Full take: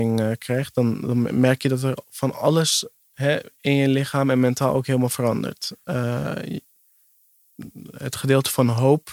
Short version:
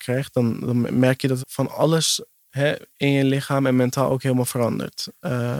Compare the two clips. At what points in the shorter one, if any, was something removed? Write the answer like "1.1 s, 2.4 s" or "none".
1.4 s